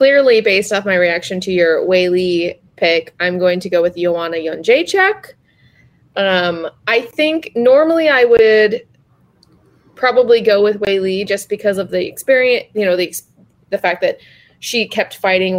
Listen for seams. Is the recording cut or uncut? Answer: uncut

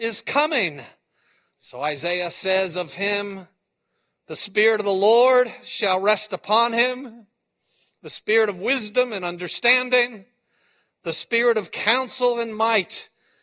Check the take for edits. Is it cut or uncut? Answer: cut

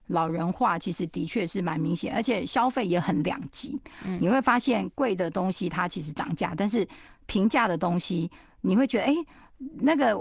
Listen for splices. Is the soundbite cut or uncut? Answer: uncut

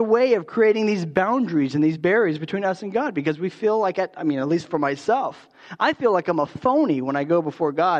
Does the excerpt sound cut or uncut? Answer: uncut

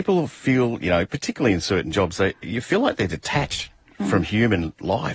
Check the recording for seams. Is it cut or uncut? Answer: uncut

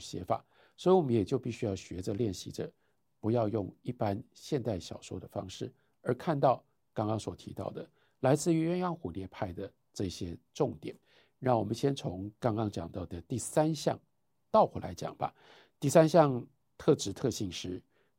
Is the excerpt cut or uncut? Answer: uncut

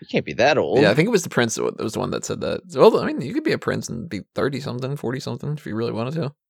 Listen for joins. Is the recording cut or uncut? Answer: uncut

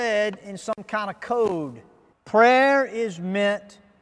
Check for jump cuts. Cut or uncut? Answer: cut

